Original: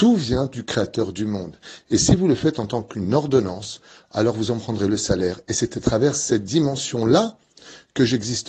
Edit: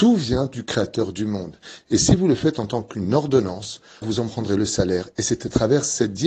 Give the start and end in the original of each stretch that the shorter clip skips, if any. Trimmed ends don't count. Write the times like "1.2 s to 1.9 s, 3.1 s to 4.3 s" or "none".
4.0 s to 4.3 s